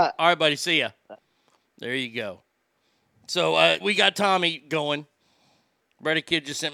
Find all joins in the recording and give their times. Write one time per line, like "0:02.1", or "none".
0:03.8

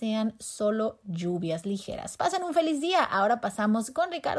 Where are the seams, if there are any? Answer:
none

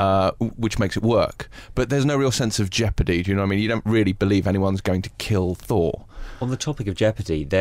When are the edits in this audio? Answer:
none

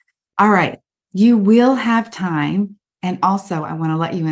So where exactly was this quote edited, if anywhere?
0:00.9

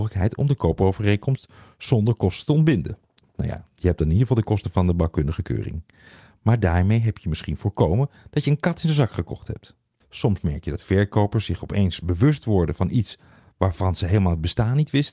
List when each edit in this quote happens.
0:10.0

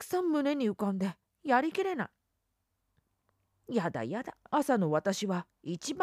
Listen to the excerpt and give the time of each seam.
0:04.5

